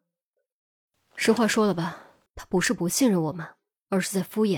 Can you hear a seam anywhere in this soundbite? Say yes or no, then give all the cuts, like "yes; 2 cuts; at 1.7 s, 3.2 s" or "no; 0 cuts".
yes; 1 cut; at 2.3 s